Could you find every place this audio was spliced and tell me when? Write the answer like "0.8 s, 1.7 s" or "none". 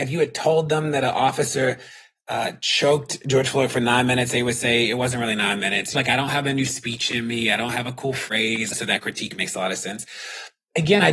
5.9 s, 8.7 s